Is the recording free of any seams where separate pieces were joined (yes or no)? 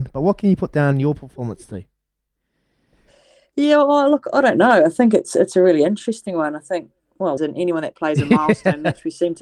no